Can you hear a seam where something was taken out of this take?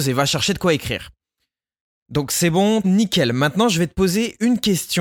yes; 1 cut; at 2.8 s

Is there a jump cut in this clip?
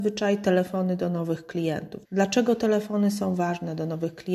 yes; 1 cut; at 2.1 s

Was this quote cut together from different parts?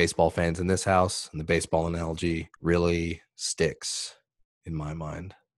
yes; 1 cut; at 2.6 s

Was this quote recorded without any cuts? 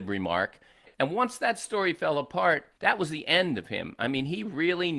no; 2 cuts; at 0.9 s, 2.7 s

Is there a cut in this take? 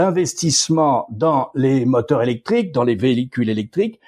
no; 0 cuts

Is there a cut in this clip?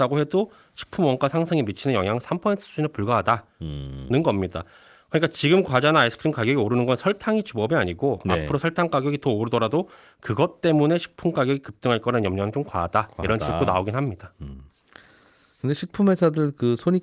no; 0 cuts

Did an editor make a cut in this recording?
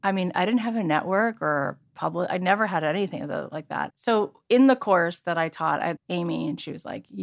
yes; 2 cuts; at 3.9 s, 6.0 s

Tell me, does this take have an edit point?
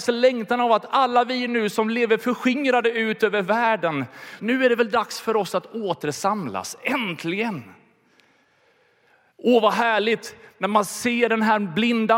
yes; 1 cut; at 4.4 s

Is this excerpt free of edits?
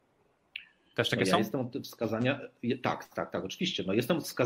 yes; 0 cuts

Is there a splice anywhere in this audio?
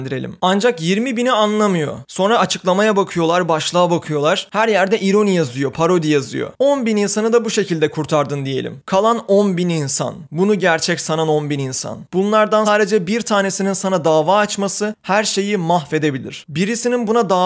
yes; 1 cut; at 12.7 s

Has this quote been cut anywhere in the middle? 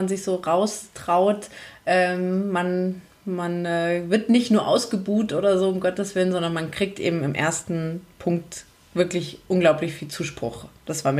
no; 0 cuts

